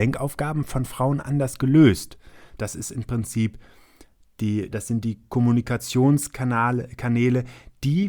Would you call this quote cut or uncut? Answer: cut